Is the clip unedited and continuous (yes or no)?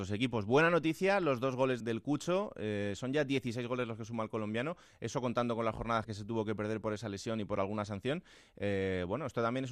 no